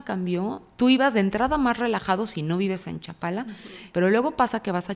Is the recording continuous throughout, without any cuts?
no; 1 cut; at 3.9 s

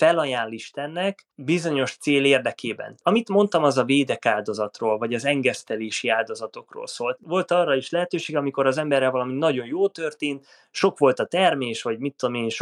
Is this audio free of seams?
no; 1 cut; at 7.2 s

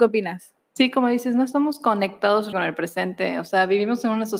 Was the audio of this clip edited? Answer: yes; 1 cut; at 2.5 s

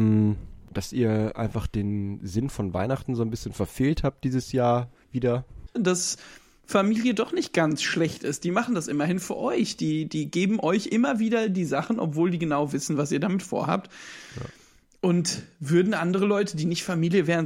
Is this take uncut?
no; 1 cut; at 5.7 s

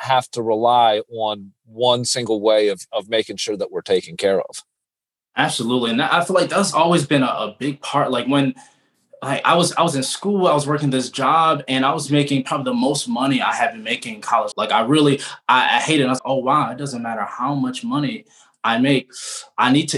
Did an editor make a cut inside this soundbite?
yes; 2 cuts; at 14.5 s, 16.2 s

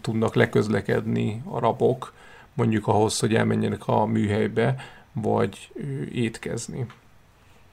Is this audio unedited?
yes; 0 cuts

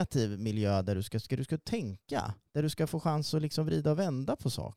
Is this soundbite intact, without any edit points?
yes; 0 cuts

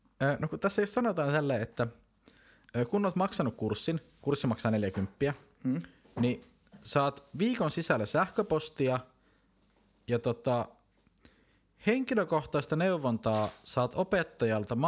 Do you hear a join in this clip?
no; 0 cuts

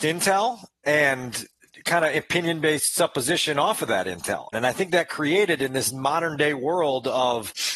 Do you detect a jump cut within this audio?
yes; 1 cut; at 4.5 s

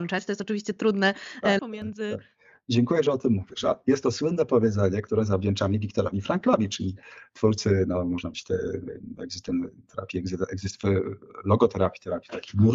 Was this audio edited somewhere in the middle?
yes; 1 cut; at 1.6 s

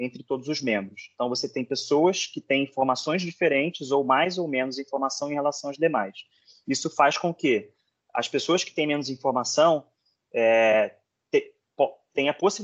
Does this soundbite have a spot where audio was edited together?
no; 0 cuts

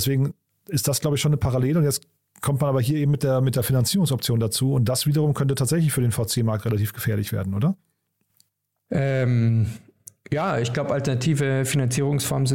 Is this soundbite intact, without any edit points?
yes; 0 cuts

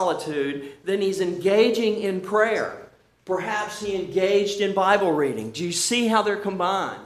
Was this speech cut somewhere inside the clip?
no; 0 cuts

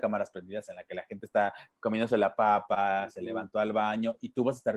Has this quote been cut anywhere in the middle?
no; 0 cuts

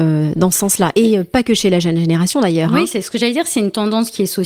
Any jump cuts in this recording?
no; 0 cuts

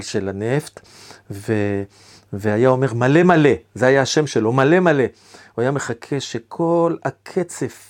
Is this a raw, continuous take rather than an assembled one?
yes; 0 cuts

